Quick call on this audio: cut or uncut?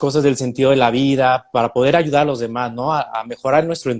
uncut